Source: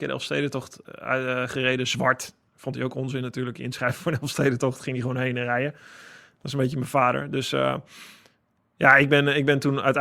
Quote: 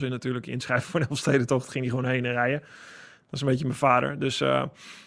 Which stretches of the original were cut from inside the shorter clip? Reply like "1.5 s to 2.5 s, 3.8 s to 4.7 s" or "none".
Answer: none